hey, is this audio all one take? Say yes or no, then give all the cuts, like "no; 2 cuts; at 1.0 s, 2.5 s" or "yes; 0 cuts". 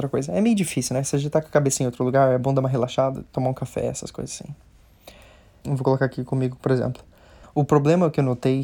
no; 2 cuts; at 5.6 s, 7.4 s